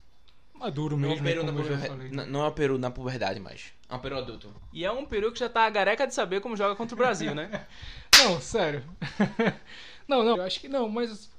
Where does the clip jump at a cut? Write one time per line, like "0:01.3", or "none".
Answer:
0:10.3